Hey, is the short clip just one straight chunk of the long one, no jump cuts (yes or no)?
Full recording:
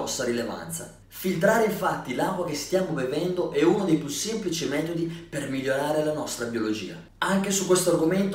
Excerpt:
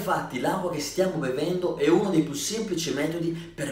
yes